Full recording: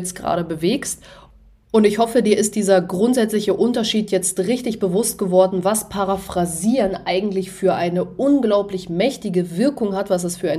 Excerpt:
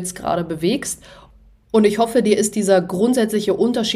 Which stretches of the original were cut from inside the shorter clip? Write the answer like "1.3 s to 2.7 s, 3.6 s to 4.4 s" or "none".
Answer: none